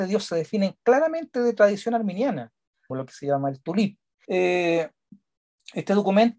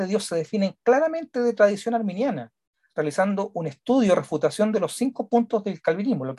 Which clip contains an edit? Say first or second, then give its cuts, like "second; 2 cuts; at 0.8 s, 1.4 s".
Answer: first; 2 cuts; at 2.9 s, 4.2 s